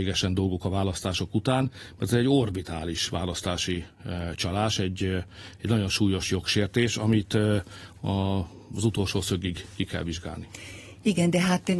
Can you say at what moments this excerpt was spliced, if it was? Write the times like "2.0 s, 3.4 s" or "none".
none